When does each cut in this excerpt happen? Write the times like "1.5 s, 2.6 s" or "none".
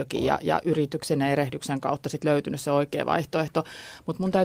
none